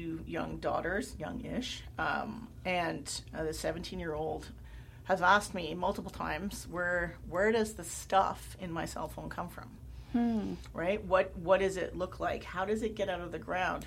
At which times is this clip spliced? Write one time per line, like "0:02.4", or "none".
none